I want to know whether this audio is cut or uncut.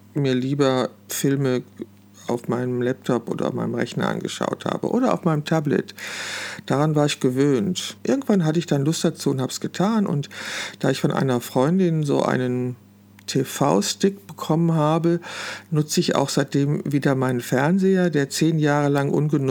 cut